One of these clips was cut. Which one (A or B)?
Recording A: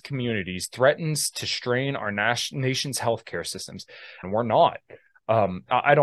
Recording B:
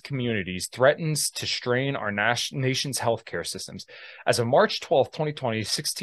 A